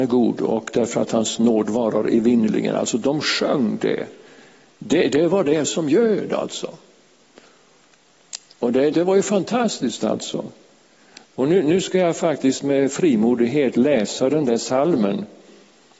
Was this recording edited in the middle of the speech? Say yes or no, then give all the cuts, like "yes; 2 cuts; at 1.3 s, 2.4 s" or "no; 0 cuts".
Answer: yes; 1 cut; at 8.9 s